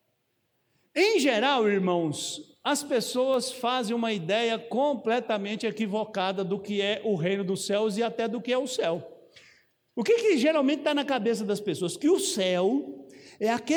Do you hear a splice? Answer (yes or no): no